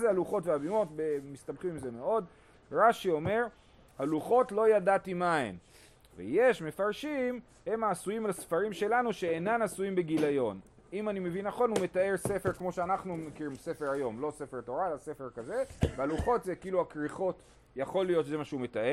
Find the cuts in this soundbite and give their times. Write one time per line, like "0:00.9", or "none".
none

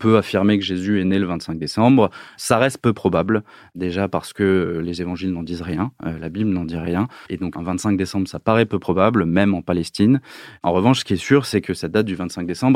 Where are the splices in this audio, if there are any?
0:07.3

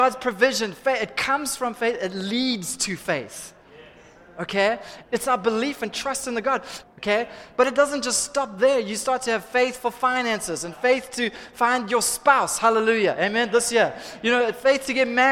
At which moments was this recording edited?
0:05.0
0:06.8

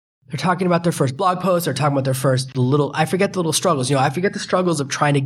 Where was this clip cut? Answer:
none

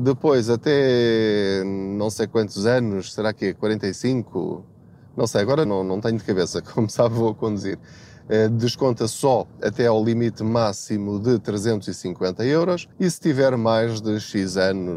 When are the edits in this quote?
0:05.6
0:12.9

